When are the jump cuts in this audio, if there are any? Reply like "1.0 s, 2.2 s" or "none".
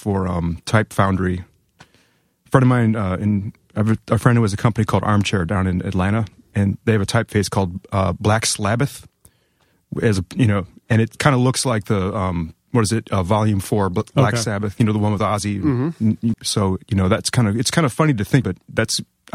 16.3 s, 18.4 s